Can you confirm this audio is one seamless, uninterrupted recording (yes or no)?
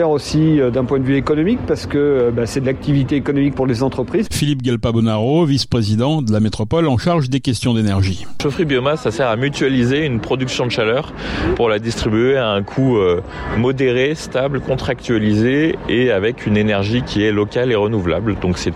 no